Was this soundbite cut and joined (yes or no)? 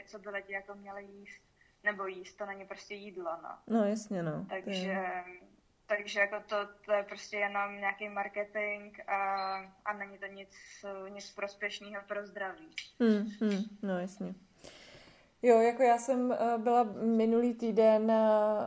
no